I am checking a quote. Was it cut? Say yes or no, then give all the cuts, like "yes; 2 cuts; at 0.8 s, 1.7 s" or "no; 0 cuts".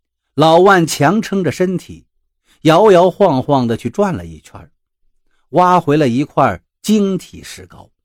no; 0 cuts